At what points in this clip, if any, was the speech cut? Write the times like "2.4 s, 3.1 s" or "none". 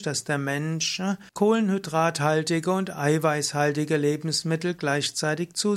1.3 s